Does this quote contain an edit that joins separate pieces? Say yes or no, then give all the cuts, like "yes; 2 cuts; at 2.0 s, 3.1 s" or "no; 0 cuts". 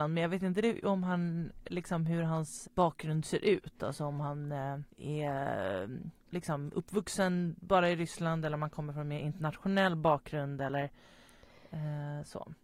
yes; 3 cuts; at 2.6 s, 4.9 s, 6.2 s